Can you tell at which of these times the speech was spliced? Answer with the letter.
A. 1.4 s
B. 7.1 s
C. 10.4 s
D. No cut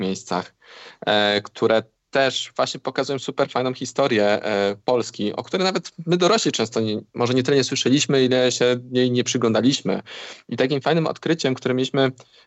D